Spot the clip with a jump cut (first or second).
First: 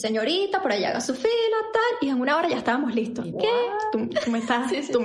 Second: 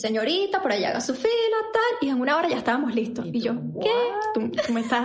first